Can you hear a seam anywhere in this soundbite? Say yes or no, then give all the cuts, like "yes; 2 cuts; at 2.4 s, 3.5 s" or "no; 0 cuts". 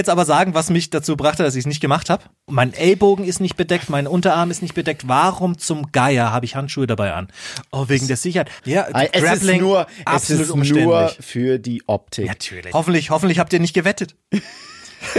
yes; 3 cuts; at 2.5 s, 8.6 s, 12.7 s